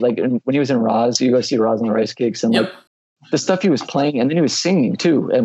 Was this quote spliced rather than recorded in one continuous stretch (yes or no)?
no